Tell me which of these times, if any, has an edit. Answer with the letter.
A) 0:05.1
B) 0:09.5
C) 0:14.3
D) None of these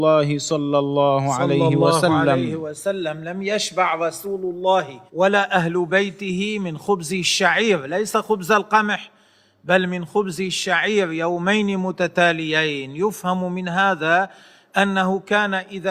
A